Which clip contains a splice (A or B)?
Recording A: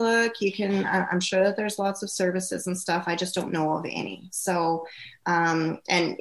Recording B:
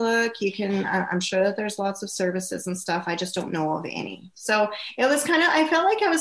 B